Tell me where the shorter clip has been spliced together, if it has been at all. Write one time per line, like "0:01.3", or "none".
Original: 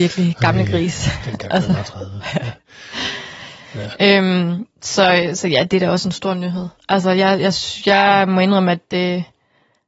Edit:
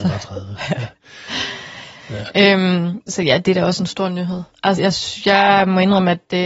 0:03.1
0:04.8